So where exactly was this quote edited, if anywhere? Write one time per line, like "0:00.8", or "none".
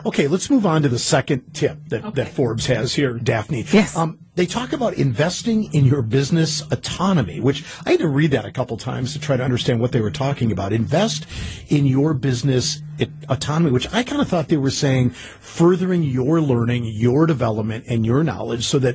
none